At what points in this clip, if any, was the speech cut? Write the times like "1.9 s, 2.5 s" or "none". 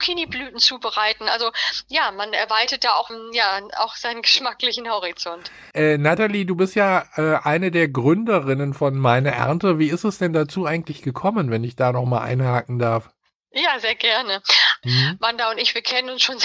3.1 s, 5.7 s, 14.8 s

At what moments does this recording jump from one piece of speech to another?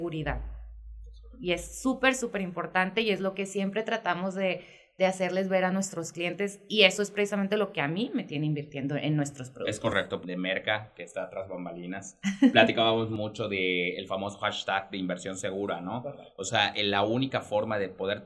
10.2 s

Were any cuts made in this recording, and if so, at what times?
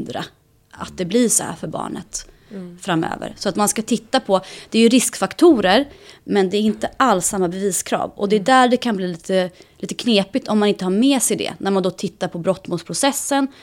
none

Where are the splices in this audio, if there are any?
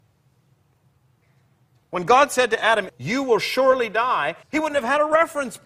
2.9 s, 4.4 s

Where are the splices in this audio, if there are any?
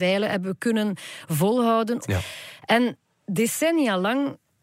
2.0 s

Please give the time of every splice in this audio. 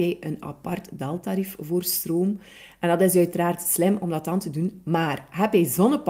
none

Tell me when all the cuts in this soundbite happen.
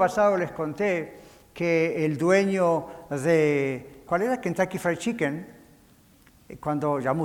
4.1 s

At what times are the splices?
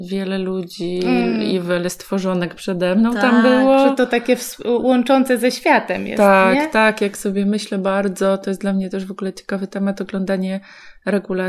none

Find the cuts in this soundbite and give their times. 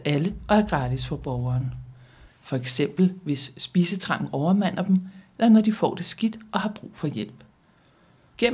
2.3 s

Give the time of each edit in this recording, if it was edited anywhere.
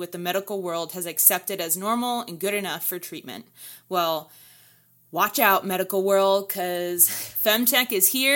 none

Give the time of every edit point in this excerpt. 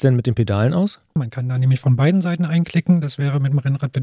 1.2 s

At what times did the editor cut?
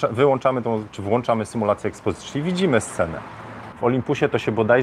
3.7 s

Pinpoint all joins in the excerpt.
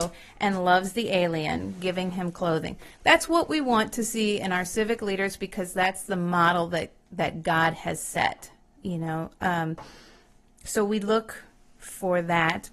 none

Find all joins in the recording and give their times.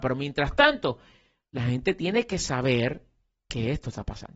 none

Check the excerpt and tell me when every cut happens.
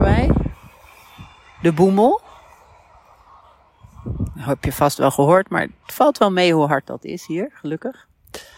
none

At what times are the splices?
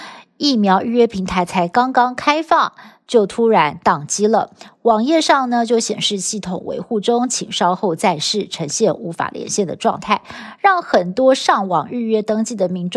none

